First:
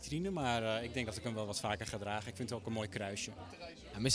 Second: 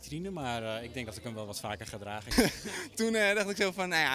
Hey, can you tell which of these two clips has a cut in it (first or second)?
second